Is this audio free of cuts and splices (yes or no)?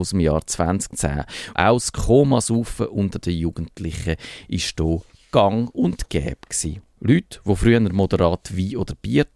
no